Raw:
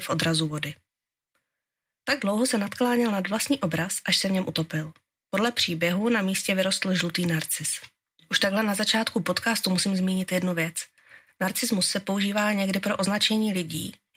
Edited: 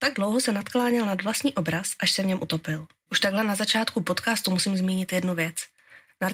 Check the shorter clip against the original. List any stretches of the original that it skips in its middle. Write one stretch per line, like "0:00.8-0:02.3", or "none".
0:05.1-0:08.3